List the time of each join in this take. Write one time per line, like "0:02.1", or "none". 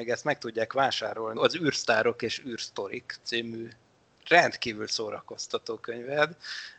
0:01.4